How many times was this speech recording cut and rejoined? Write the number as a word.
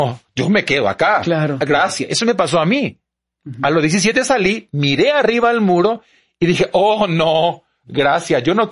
zero